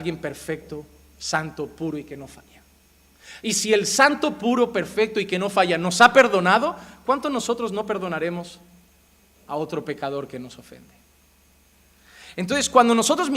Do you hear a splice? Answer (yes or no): no